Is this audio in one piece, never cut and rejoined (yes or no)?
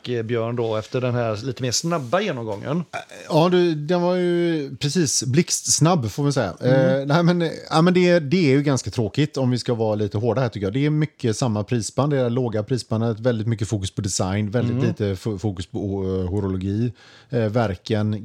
yes